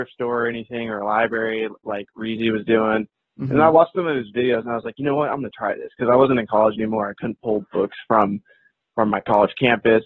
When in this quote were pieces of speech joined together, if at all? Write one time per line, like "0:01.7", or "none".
none